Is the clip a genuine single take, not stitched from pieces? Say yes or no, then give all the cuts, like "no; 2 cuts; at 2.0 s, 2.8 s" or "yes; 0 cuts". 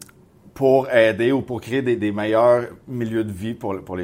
yes; 0 cuts